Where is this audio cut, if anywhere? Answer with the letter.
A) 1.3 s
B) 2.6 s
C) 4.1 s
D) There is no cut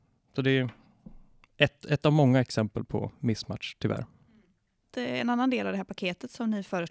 D